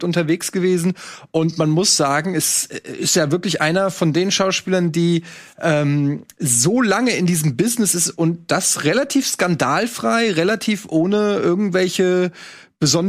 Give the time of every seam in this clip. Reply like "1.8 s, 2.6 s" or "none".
none